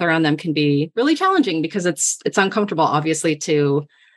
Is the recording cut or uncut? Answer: uncut